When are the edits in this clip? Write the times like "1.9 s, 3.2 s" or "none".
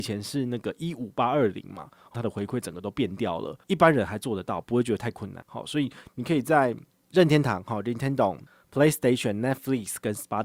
2.1 s, 3.6 s, 5.4 s